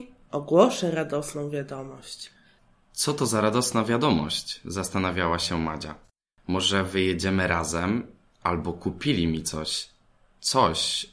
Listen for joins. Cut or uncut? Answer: uncut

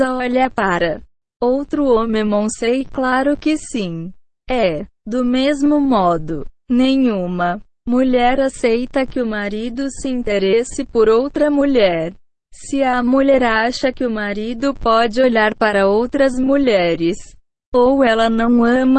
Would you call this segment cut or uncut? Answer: uncut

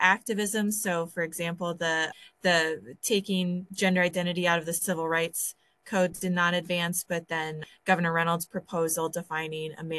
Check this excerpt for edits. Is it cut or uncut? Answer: uncut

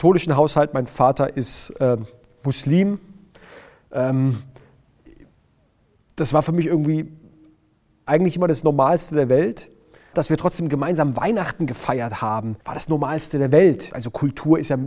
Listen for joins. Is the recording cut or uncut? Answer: cut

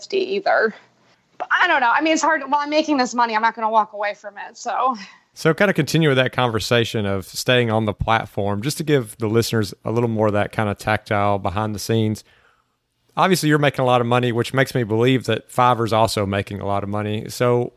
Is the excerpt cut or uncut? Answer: uncut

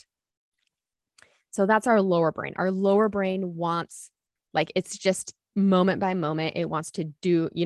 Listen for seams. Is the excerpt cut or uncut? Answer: uncut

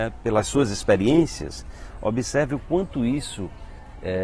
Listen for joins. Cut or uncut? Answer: uncut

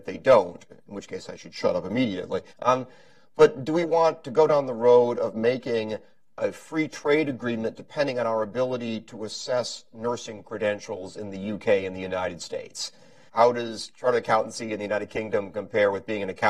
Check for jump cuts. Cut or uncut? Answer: cut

